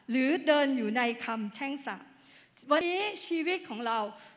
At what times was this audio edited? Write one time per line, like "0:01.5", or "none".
0:02.8